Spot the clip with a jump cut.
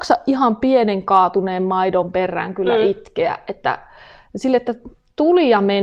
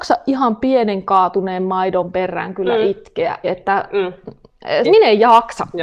second; 2 cuts; at 3.4 s, 4.8 s

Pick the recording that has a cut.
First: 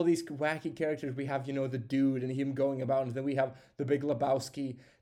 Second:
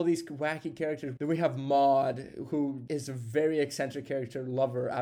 second; 2 cuts; at 1.2 s, 2.9 s

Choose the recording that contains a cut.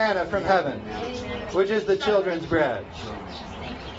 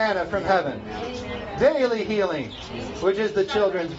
first; 1 cut; at 1.5 s

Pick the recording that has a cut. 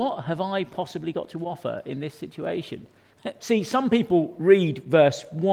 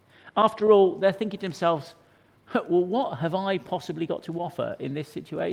first; 1 cut; at 3.4 s

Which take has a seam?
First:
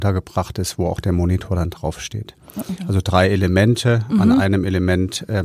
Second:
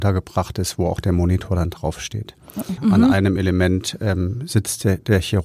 second; 1 cut; at 2.8 s

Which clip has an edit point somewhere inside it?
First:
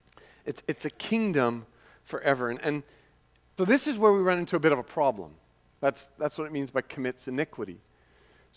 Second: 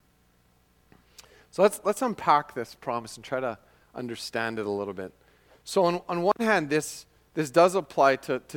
first; 2 cuts; at 3.6 s, 5.7 s

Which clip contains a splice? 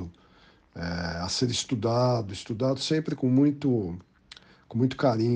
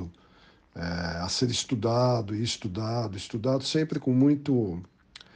first; 1 cut; at 2.3 s

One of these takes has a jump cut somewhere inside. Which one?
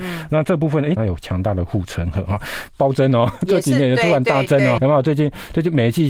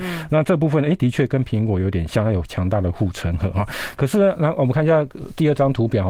first; 3 cuts; at 1.0 s, 2.7 s, 4.8 s

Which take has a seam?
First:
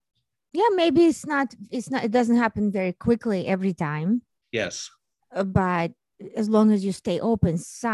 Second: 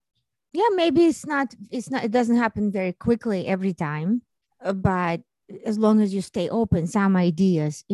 second; 2 cuts; at 4.4 s, 6.9 s

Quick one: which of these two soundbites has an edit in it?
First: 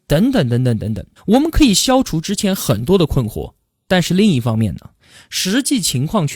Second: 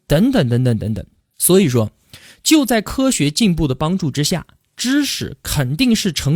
first; 1 cut; at 1.2 s

